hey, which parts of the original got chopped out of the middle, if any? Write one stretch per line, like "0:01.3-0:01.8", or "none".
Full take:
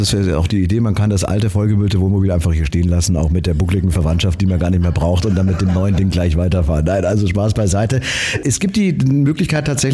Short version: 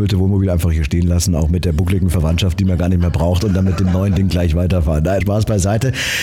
0:07.0-0:07.3